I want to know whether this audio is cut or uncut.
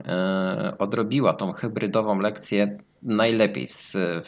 uncut